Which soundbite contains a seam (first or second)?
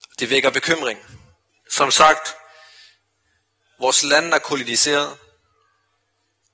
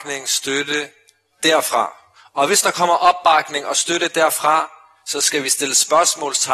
first